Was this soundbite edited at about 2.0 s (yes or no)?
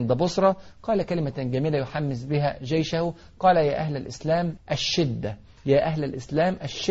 no